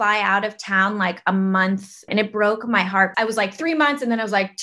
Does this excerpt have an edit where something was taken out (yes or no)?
yes